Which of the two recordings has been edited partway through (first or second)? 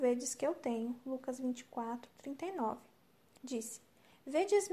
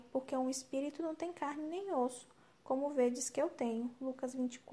first